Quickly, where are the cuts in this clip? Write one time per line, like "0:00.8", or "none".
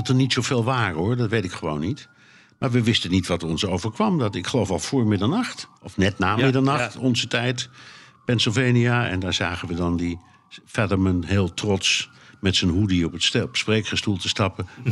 0:05.8